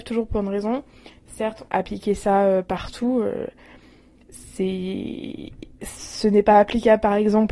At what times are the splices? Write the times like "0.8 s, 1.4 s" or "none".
1.7 s